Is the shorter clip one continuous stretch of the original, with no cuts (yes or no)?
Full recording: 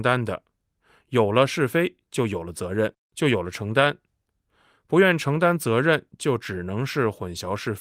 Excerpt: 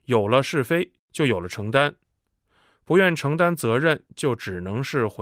no